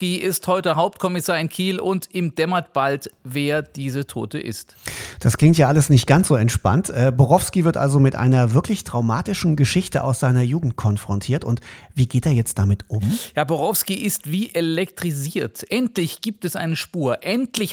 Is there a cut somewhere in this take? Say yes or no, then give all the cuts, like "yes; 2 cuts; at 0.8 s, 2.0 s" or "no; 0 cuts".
no; 0 cuts